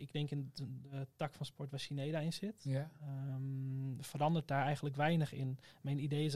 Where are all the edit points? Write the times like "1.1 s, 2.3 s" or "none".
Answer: none